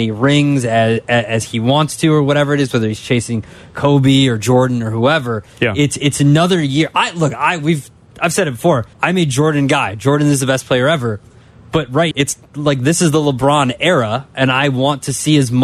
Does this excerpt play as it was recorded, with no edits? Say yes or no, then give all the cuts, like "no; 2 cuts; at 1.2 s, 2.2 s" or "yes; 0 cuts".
no; 2 cuts; at 8.9 s, 12.1 s